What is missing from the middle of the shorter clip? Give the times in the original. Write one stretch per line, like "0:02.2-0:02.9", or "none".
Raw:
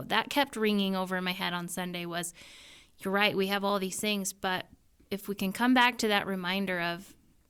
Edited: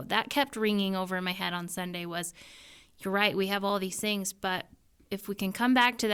none